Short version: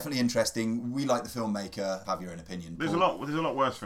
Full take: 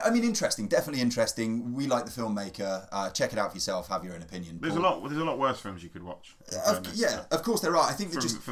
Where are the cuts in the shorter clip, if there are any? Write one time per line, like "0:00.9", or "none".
0:02.0

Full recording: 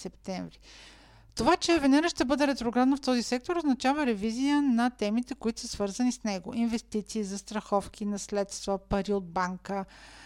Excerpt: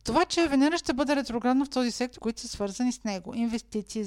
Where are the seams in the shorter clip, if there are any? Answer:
0:02.2

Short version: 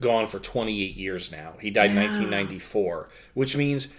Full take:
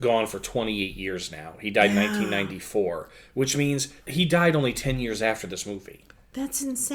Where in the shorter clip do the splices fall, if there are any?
none

